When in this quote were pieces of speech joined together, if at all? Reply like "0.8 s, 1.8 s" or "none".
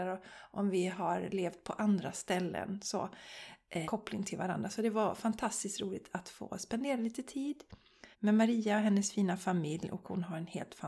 3.8 s, 8.1 s